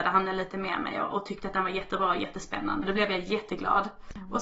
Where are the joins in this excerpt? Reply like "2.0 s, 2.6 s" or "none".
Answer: 2.8 s